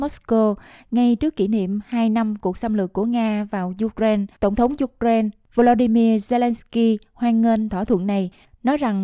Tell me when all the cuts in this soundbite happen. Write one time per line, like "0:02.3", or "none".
0:04.3